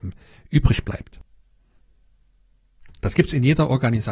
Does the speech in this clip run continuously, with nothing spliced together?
no; 1 cut; at 3.0 s

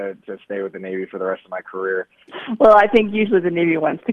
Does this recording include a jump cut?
yes; 1 cut; at 2.3 s

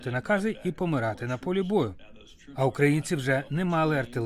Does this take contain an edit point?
no; 0 cuts

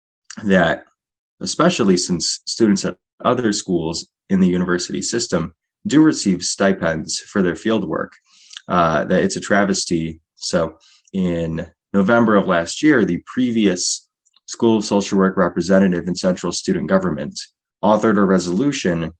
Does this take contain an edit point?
no; 0 cuts

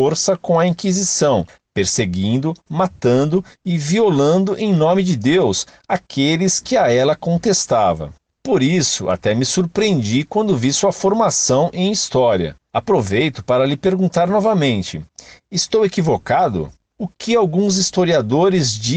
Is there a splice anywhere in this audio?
yes; 1 cut; at 8.4 s

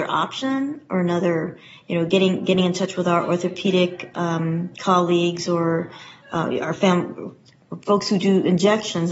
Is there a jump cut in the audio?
no; 0 cuts

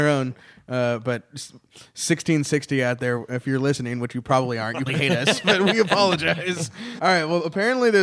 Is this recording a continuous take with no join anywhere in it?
no; 2 cuts; at 4.9 s, 7.0 s

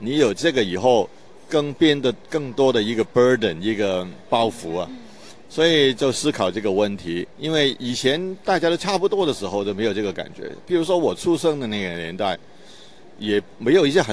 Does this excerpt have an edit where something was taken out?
yes; 1 cut; at 7.3 s

